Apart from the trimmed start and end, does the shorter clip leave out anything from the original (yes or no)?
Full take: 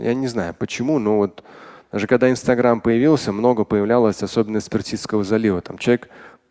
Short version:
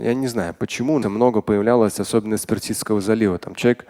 yes